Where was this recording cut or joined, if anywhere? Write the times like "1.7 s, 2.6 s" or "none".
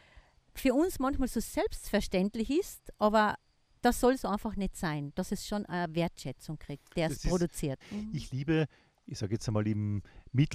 7.8 s

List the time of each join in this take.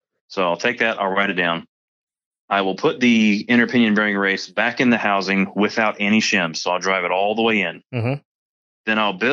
none

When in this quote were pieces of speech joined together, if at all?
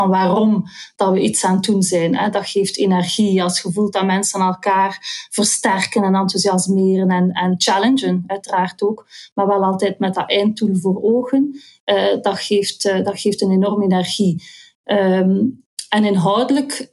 none

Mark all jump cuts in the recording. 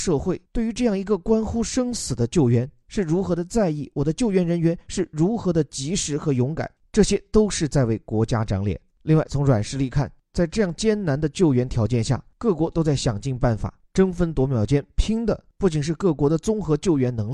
9.0 s

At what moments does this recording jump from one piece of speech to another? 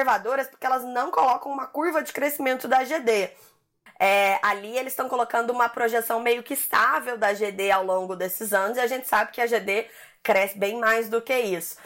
3.9 s

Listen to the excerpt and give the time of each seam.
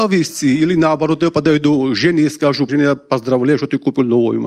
2.7 s

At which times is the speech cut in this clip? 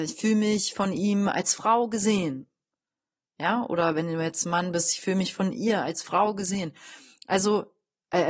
none

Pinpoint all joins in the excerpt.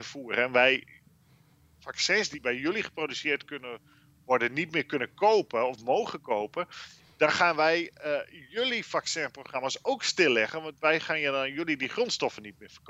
none

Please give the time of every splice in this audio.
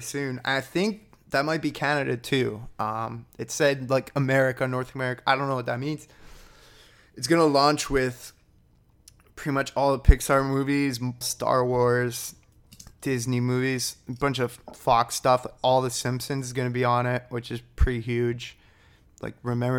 11.2 s

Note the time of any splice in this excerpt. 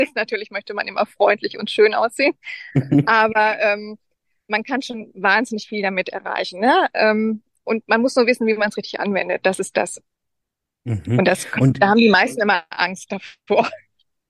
none

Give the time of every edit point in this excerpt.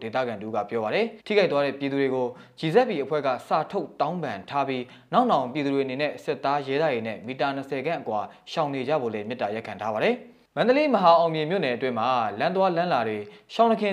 1.2 s

